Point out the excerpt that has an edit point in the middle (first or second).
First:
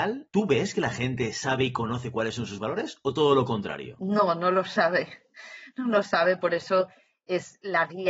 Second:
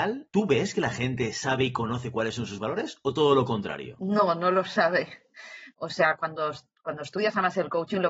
second